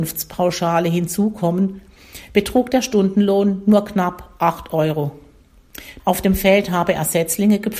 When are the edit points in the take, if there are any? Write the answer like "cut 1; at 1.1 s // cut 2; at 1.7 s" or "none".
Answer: cut 1; at 6.0 s